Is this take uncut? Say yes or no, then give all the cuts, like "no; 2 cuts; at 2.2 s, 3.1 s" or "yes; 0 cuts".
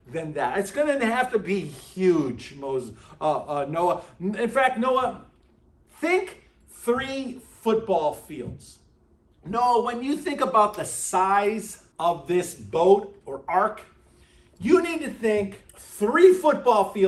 no; 3 cuts; at 9.3 s, 11.9 s, 15.7 s